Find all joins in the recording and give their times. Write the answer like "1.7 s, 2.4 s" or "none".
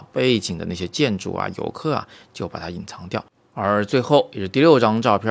none

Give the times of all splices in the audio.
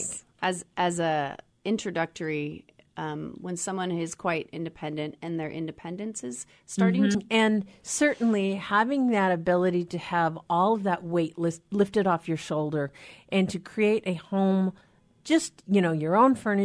7.1 s

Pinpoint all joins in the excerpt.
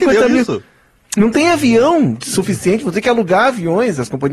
none

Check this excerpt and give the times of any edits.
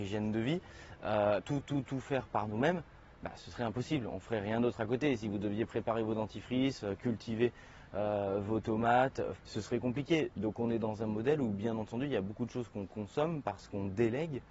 1.4 s, 9.4 s

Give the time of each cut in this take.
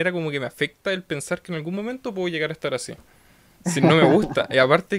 3.6 s

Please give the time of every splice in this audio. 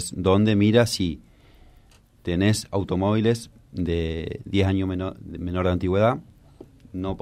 none

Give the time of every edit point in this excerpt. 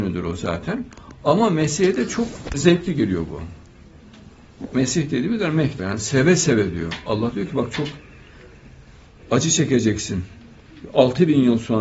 2.5 s, 5.8 s

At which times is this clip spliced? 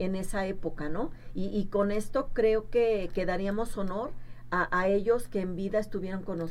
none

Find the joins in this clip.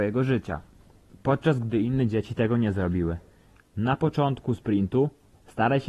3.6 s

